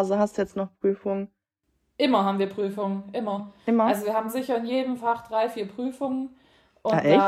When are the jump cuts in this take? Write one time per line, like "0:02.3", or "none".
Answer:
none